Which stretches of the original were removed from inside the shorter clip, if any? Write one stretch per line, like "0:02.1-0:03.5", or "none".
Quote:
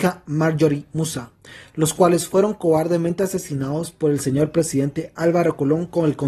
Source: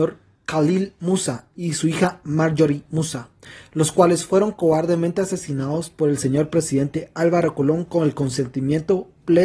none